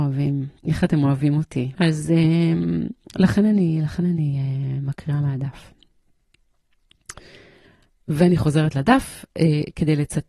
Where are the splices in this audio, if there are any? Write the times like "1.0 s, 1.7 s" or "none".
1.8 s

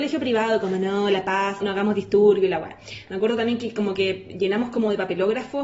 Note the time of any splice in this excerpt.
1.6 s

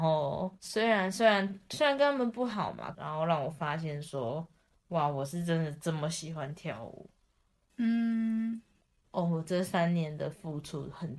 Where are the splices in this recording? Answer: 2.9 s, 9.0 s

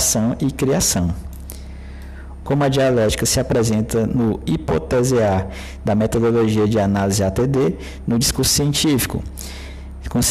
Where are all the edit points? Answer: 2.4 s

